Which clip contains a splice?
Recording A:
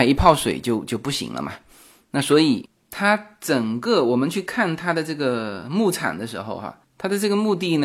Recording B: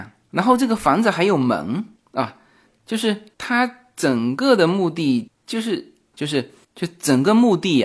B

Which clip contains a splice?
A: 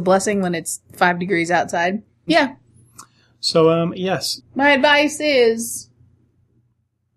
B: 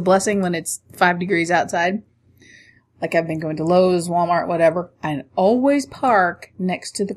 A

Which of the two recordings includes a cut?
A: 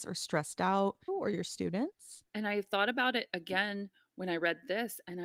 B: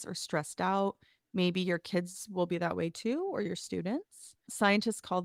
A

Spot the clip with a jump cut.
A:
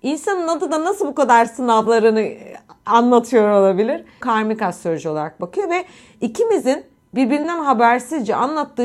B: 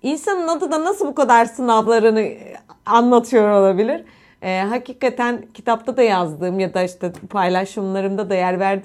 A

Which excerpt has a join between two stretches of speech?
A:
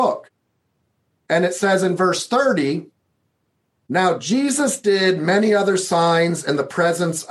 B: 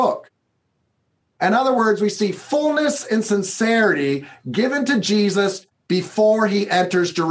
B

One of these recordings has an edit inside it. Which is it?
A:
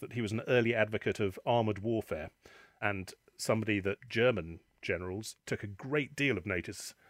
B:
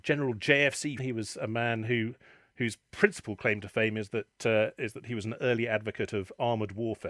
B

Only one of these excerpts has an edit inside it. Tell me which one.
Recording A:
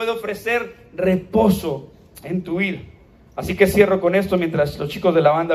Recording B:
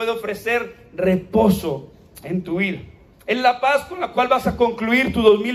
B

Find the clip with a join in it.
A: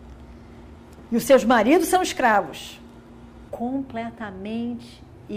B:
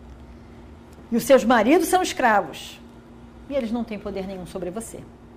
A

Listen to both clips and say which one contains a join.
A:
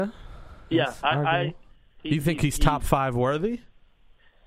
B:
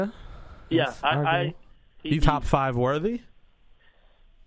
B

